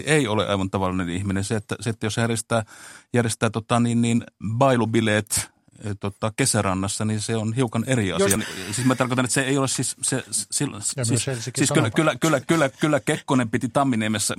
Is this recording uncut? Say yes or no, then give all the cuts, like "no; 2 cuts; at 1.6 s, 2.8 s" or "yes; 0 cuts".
no; 1 cut; at 8.4 s